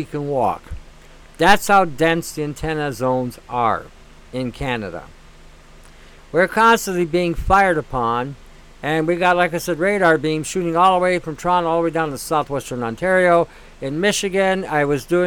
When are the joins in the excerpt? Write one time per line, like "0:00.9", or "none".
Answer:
none